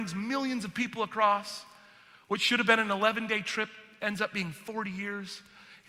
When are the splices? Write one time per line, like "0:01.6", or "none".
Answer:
none